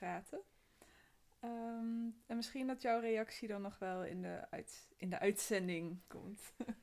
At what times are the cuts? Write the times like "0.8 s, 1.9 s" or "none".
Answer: none